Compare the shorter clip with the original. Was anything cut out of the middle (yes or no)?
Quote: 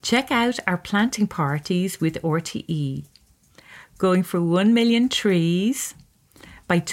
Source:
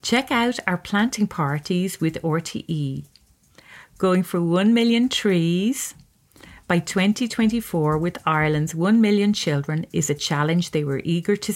no